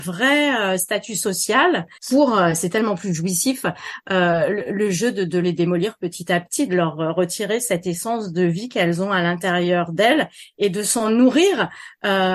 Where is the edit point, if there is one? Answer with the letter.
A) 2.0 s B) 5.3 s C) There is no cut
A